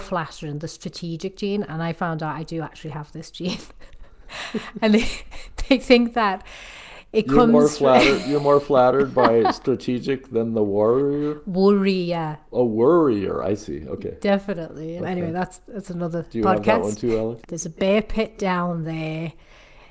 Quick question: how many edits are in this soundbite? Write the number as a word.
two